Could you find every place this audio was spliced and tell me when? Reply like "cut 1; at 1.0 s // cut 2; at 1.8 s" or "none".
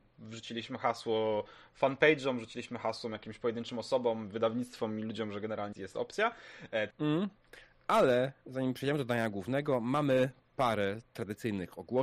cut 1; at 5.7 s // cut 2; at 6.9 s